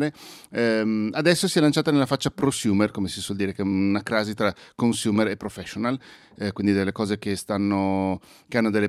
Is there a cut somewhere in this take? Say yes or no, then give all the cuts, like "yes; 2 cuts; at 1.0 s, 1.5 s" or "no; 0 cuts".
no; 0 cuts